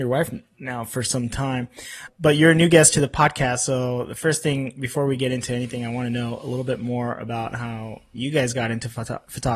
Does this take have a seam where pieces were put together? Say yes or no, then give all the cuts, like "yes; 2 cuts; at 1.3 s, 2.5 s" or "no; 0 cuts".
yes; 1 cut; at 2.1 s